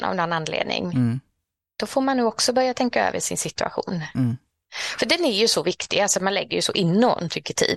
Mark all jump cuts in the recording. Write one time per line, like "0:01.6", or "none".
none